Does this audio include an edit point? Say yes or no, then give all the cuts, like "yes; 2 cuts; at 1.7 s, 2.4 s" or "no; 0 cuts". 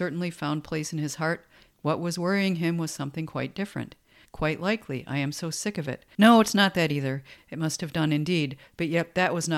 yes; 3 cuts; at 4.2 s, 6.2 s, 7.4 s